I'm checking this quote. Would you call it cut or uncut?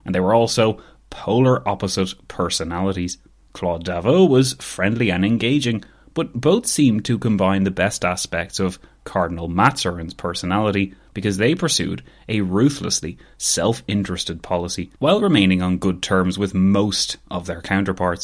cut